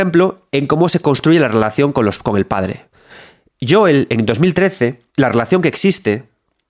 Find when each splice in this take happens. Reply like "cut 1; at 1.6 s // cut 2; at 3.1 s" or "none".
cut 1; at 5.1 s